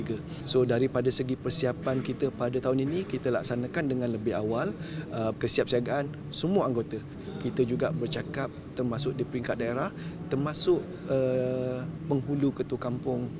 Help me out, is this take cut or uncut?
cut